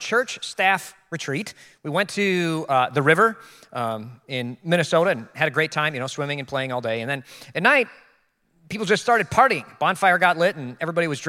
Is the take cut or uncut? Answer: uncut